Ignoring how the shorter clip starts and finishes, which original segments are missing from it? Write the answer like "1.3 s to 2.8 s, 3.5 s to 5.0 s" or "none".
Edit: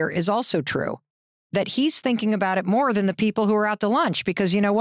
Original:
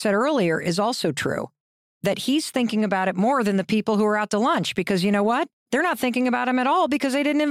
none